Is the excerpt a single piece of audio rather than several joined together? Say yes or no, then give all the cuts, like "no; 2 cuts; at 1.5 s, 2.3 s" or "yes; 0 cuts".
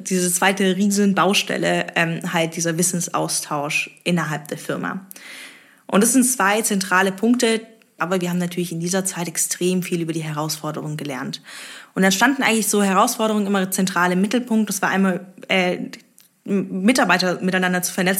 no; 1 cut; at 8.0 s